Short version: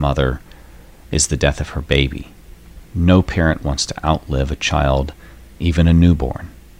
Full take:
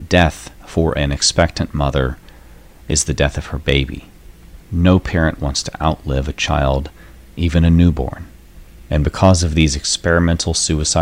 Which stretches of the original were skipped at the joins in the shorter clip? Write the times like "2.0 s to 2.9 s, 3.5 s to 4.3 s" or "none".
none